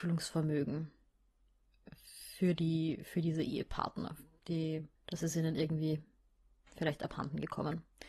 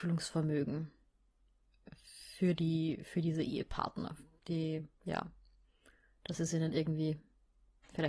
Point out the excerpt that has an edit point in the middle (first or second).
first